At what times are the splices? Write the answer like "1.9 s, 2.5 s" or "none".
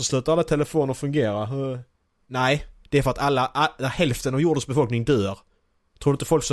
none